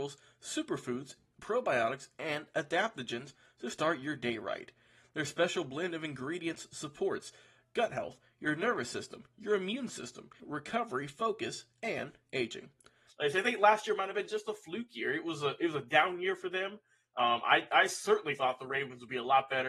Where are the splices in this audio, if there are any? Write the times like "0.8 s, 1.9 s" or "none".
10.4 s, 13.1 s